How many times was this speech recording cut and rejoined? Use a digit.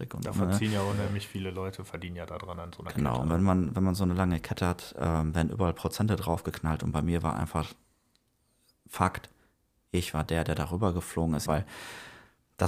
1